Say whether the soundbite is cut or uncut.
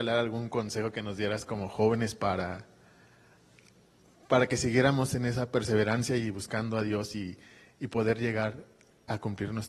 uncut